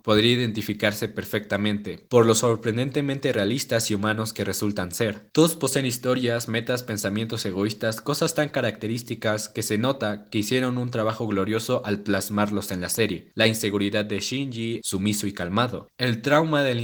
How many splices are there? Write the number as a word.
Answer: two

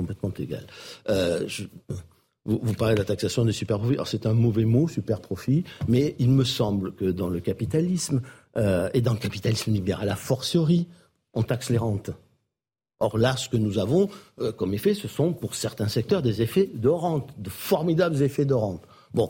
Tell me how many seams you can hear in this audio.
zero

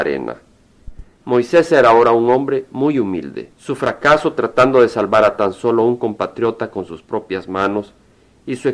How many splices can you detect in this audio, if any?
two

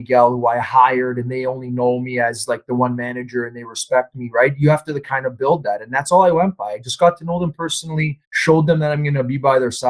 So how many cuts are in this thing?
one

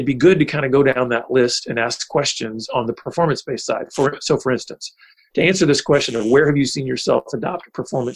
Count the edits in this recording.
zero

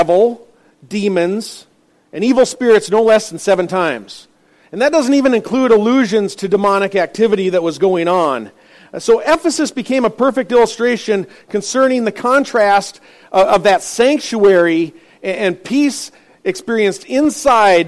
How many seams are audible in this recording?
zero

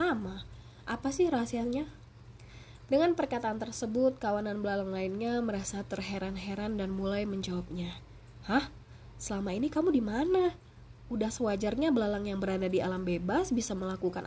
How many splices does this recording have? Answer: one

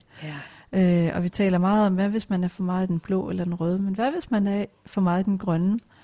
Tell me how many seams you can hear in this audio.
zero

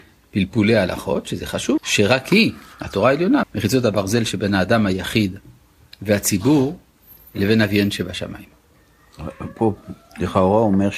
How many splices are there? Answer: two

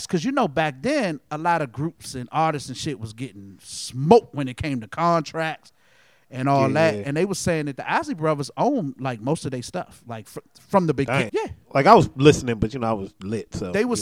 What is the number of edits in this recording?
one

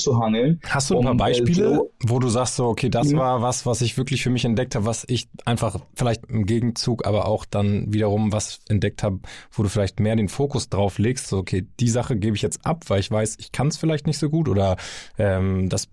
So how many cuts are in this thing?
two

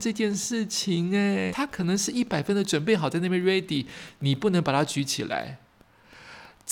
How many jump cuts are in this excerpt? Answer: one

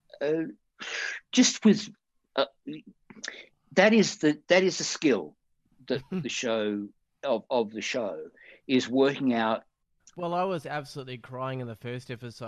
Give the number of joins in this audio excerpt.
one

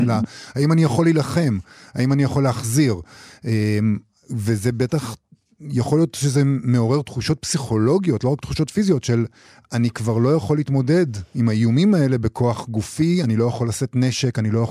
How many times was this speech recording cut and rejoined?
zero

